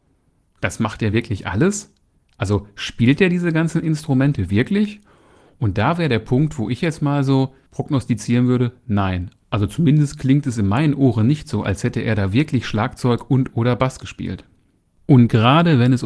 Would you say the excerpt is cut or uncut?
uncut